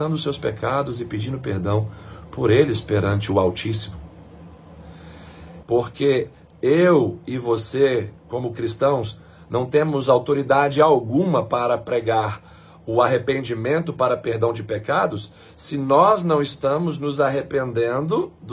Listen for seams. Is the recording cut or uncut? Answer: cut